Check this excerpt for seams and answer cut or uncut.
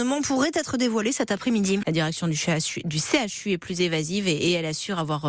cut